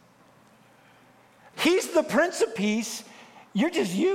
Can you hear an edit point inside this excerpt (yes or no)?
yes